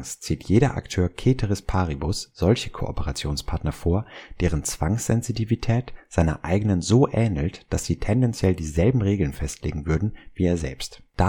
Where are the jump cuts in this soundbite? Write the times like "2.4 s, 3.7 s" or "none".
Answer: none